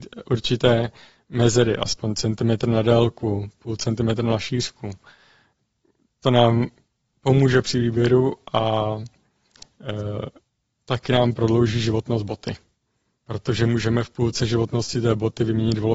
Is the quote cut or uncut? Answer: uncut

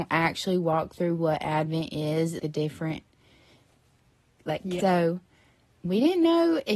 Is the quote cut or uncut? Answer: cut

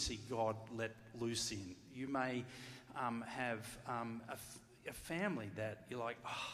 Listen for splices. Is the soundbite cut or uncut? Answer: uncut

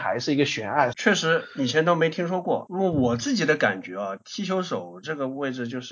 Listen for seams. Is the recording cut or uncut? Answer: cut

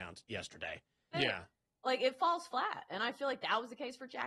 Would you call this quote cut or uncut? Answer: cut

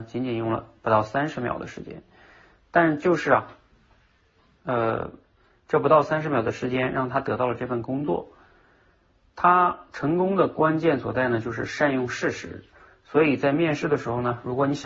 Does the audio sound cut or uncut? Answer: uncut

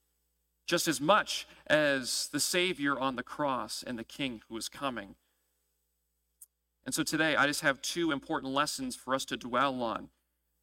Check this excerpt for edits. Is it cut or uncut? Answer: uncut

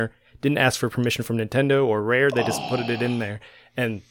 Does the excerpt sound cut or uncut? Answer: uncut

